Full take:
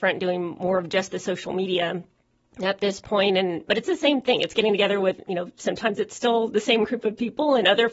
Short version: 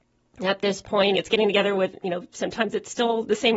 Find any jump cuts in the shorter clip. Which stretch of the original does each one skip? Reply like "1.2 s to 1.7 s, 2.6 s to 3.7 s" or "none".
3.3 s to 4.4 s